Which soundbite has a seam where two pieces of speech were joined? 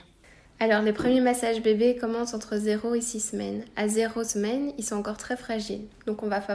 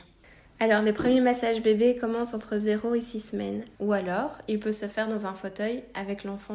second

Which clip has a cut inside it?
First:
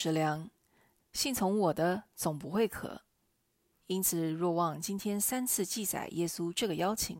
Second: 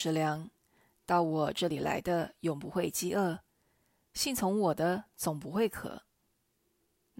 first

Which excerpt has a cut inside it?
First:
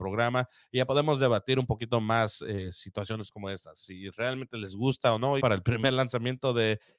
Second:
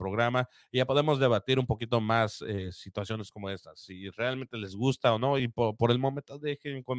first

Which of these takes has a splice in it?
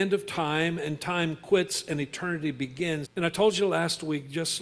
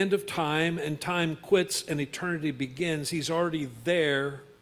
first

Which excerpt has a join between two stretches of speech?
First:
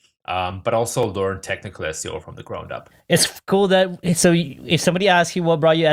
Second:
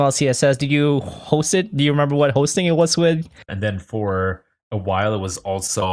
second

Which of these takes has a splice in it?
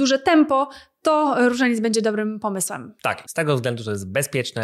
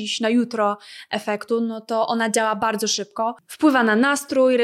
first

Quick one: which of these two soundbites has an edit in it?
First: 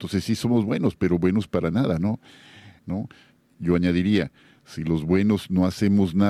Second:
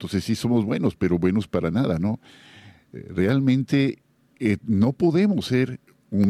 first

